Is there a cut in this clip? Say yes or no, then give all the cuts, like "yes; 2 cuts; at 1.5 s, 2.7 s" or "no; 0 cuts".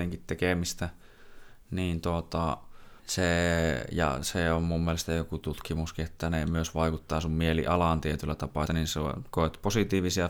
yes; 2 cuts; at 3.0 s, 8.7 s